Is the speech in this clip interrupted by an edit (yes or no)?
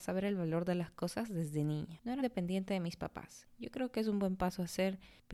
yes